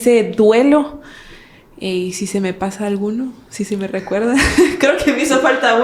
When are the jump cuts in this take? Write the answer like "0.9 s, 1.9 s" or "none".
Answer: none

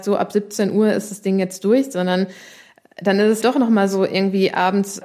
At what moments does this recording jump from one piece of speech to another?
3.4 s

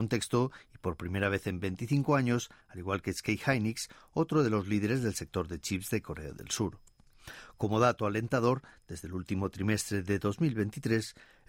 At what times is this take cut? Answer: 2.6 s

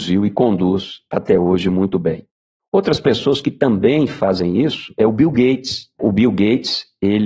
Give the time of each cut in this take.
6.0 s

